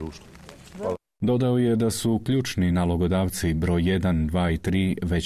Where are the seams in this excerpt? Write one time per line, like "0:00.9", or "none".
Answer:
none